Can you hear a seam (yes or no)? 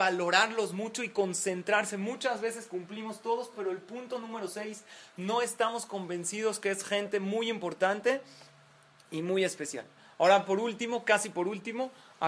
no